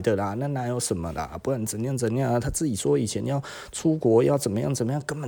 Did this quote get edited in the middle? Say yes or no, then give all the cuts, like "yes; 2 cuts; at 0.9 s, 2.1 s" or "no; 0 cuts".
no; 0 cuts